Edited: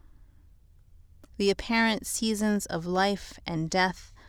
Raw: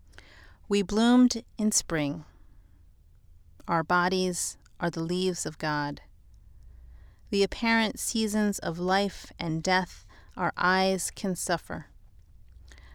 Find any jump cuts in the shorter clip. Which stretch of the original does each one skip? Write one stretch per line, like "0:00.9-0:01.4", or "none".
0:03.6-0:07.2